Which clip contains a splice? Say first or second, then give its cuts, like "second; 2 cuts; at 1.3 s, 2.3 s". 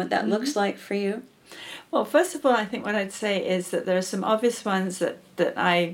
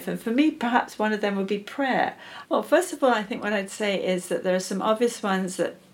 second; 1 cut; at 2.4 s